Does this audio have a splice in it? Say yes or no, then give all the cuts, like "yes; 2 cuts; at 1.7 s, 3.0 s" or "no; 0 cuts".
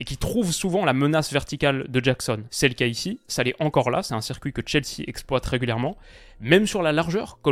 no; 0 cuts